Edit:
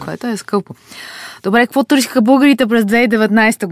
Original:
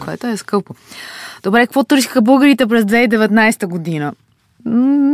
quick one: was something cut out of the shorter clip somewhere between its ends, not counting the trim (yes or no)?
no